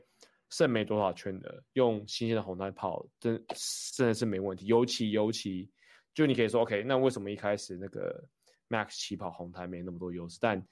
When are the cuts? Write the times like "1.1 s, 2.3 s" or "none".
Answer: none